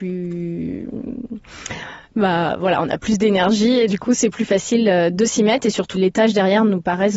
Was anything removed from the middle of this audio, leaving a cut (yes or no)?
yes